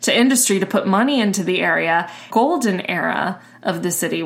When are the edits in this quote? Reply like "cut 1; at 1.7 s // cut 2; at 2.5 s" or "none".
cut 1; at 2.3 s